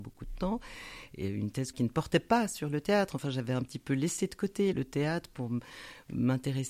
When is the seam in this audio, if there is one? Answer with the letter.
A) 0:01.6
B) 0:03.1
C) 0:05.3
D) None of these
D